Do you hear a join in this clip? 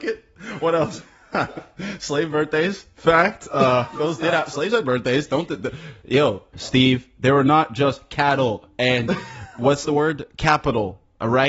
yes; 1 cut; at 6.5 s

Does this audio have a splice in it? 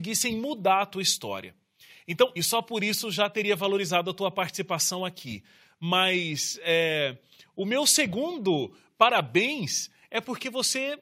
yes; 1 cut; at 2.4 s

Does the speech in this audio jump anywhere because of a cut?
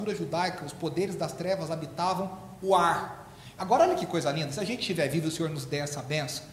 yes; 1 cut; at 3.6 s

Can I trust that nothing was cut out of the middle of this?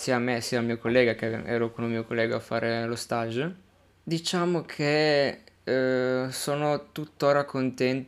no; 1 cut; at 3.9 s

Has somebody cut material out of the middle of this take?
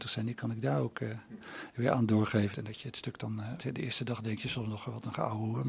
yes; 2 cuts; at 2.5 s, 3.6 s

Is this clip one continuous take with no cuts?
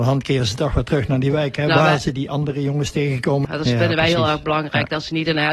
no; 1 cut; at 3.4 s

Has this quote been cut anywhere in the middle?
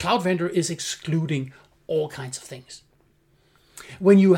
no; 0 cuts

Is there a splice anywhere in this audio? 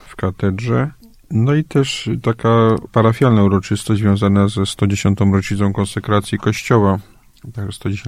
no; 0 cuts

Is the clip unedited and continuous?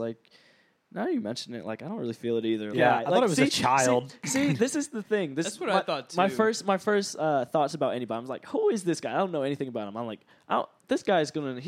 no; 1 cut; at 2.7 s

